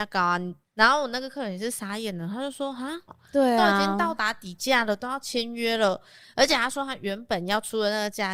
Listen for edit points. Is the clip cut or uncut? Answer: cut